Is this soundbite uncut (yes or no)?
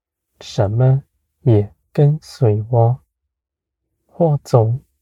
no